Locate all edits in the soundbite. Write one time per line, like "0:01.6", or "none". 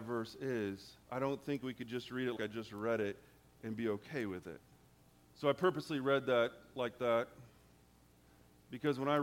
0:01.0
0:02.4
0:05.3